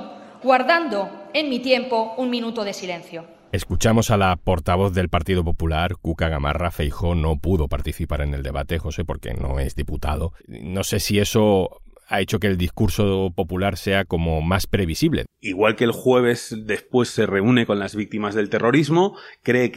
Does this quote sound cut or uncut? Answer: cut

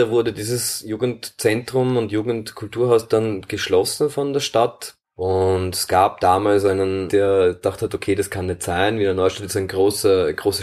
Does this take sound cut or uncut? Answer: cut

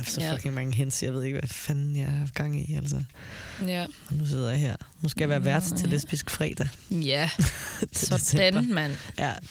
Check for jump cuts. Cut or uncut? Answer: uncut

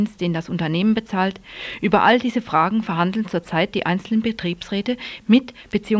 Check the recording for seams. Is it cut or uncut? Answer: uncut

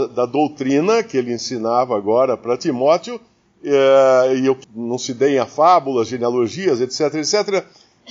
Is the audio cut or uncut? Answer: cut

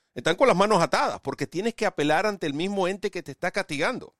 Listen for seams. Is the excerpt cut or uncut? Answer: uncut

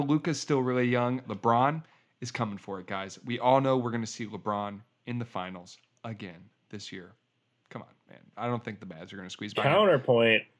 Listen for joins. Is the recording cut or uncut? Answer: cut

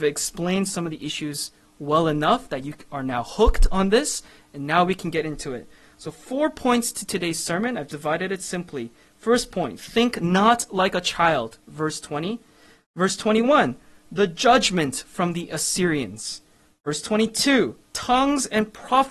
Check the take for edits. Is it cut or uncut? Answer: cut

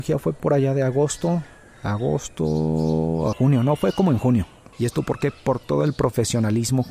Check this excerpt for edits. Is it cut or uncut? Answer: cut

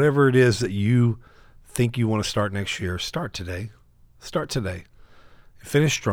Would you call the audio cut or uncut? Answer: uncut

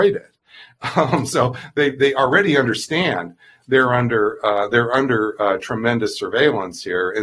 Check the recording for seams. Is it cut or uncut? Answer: uncut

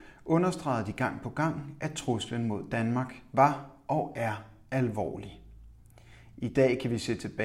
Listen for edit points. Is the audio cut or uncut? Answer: uncut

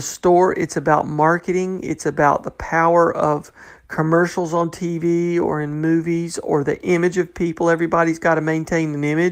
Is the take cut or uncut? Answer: uncut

